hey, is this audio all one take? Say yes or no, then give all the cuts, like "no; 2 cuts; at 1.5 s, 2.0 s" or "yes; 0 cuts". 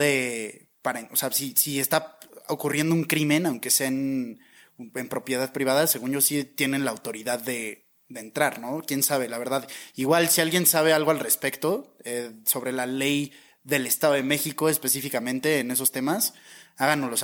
yes; 0 cuts